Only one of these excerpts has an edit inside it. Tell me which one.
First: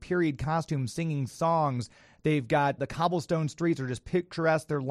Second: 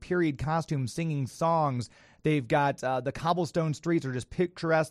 first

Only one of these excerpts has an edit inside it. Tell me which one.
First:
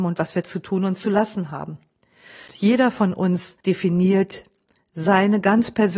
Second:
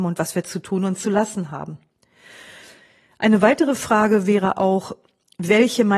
first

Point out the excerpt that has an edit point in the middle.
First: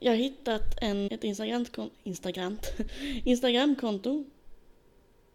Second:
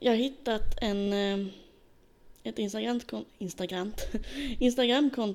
first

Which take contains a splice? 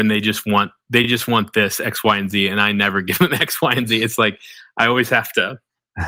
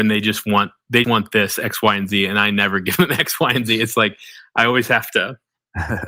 second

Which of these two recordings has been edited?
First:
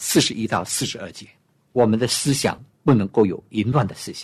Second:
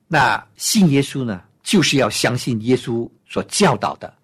first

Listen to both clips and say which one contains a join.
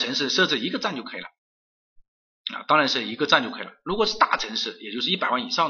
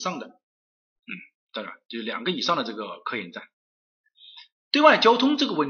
second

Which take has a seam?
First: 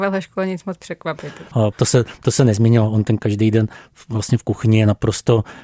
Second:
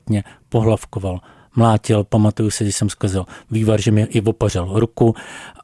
first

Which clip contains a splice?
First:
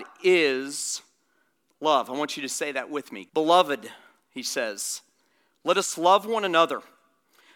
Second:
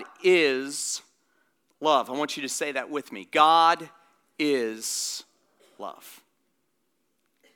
first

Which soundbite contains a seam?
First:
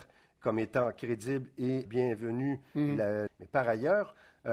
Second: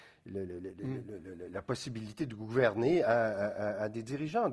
first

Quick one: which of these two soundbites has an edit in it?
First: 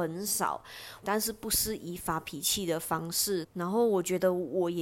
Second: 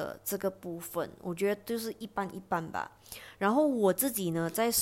first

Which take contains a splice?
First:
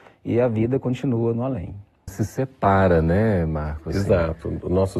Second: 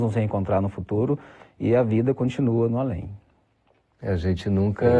first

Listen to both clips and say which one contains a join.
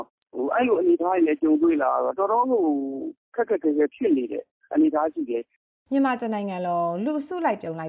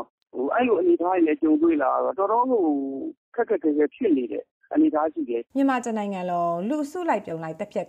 second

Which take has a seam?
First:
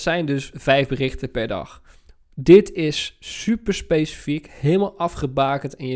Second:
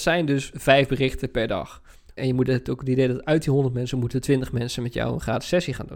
second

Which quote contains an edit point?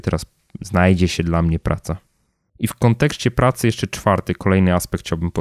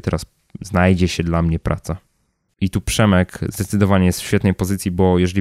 second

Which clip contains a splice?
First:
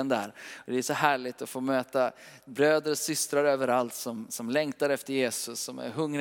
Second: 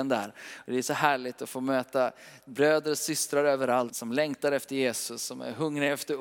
second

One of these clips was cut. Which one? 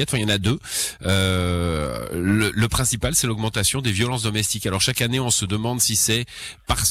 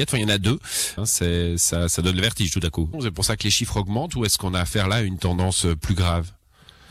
second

